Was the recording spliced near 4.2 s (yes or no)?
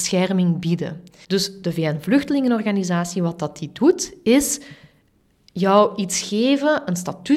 no